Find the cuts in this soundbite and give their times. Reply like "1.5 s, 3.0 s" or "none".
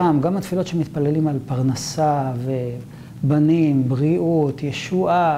none